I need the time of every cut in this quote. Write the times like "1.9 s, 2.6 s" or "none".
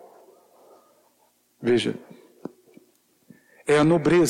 1.5 s